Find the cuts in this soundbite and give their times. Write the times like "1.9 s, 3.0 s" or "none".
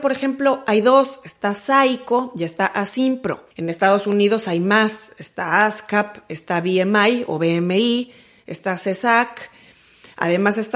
3.5 s